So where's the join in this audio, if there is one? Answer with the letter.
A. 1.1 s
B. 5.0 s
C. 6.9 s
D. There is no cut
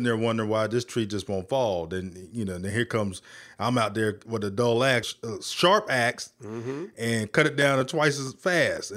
B